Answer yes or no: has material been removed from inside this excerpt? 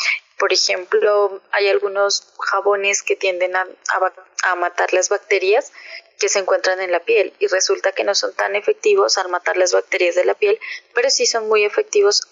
no